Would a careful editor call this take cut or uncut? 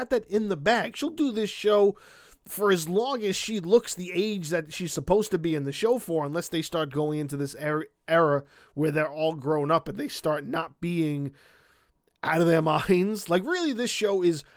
uncut